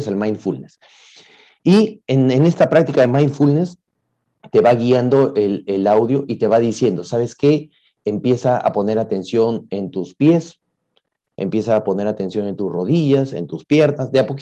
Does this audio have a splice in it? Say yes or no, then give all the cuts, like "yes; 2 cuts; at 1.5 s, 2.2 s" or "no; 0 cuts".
no; 0 cuts